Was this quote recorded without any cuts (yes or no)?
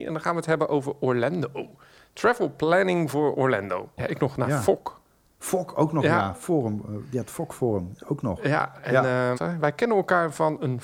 no